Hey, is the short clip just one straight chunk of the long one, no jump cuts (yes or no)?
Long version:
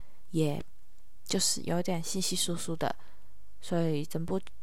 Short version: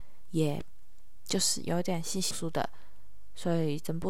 no